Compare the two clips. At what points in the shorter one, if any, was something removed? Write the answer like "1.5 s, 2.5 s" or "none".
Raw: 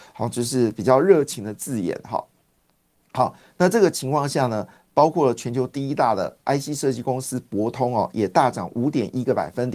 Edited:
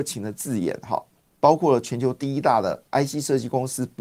1.3 s